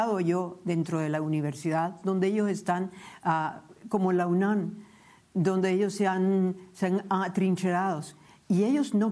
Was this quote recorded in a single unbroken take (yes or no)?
yes